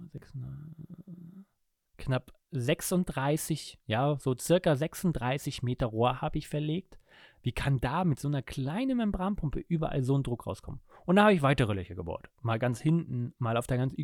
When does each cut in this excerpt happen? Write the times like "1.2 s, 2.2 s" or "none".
none